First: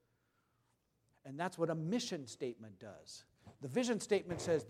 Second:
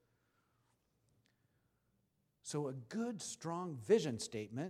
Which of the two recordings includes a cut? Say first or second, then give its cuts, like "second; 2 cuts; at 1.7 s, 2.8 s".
first; 1 cut; at 1.1 s